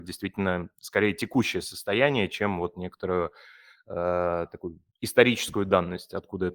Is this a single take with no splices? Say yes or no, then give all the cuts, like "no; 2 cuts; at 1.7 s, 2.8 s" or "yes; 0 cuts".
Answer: yes; 0 cuts